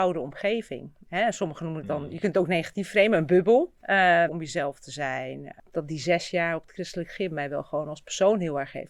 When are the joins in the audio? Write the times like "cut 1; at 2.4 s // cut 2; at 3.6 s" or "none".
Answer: cut 1; at 4.3 s

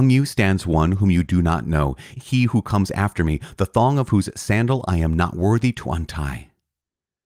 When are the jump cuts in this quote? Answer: cut 1; at 2.2 s

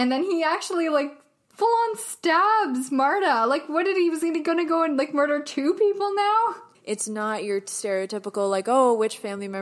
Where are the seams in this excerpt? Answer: cut 1; at 6.7 s

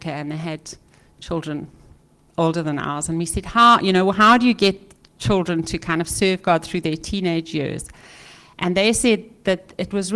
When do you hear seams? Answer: none

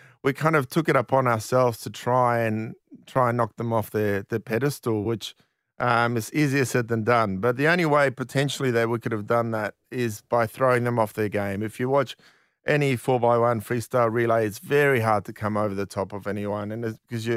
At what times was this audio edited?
none

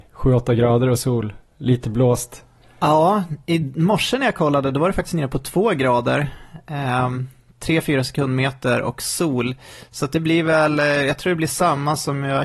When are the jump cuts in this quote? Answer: none

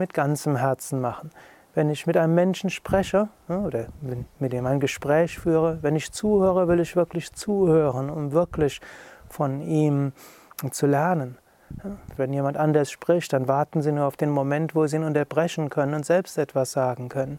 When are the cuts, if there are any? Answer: cut 1; at 12.2 s

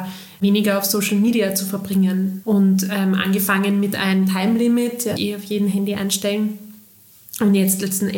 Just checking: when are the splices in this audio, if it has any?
cut 1; at 2.4 s // cut 2; at 5.2 s

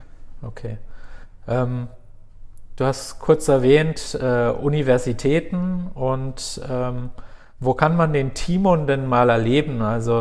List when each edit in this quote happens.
none

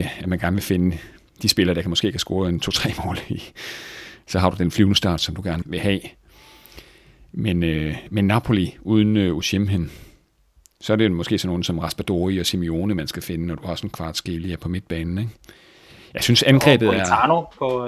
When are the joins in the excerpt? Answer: cut 1; at 5.6 s

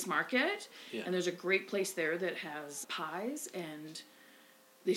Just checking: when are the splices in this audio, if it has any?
cut 1; at 2.8 s

